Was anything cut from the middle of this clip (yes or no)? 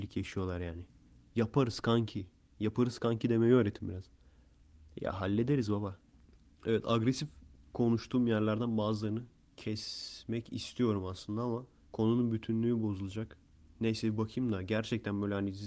yes